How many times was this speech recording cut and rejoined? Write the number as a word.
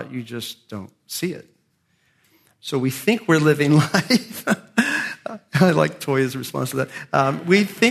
zero